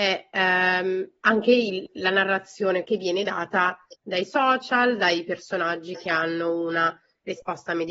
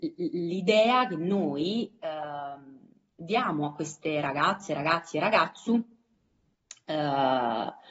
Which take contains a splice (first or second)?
first